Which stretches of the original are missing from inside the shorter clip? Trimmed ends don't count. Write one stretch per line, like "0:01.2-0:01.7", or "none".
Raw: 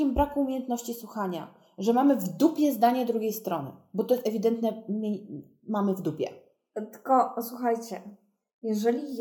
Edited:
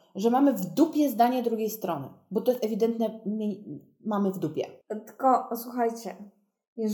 0:06.4-0:06.7